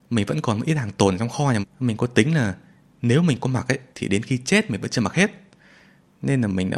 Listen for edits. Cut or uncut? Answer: cut